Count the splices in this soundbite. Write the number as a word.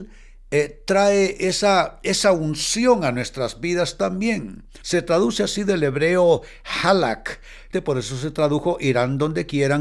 two